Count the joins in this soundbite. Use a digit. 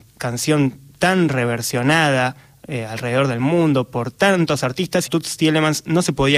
1